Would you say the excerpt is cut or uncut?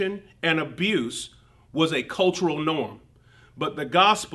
uncut